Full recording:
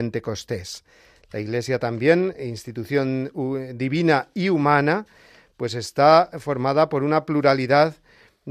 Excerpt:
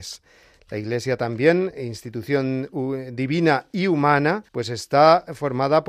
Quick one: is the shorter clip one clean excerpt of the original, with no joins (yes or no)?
no